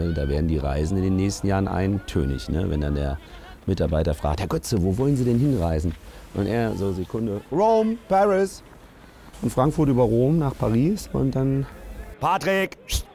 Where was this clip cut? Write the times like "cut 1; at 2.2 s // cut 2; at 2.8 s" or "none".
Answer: cut 1; at 9.3 s // cut 2; at 12.0 s

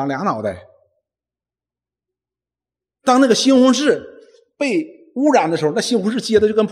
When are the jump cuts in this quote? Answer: none

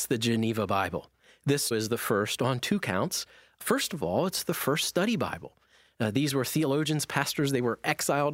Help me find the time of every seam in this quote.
cut 1; at 1.7 s

